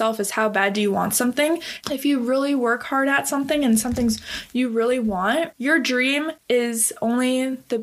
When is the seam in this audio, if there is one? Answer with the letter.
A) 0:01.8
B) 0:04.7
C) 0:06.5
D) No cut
A